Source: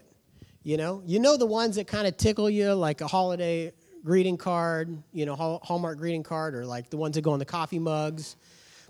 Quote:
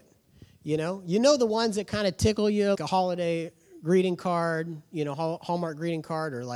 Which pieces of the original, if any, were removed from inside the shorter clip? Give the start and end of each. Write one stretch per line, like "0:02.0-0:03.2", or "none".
0:02.7-0:03.0